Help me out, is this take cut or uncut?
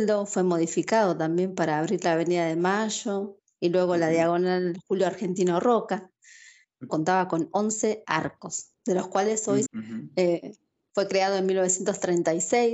cut